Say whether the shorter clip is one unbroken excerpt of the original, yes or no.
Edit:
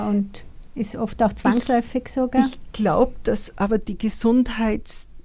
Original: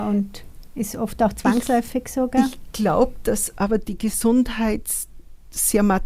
yes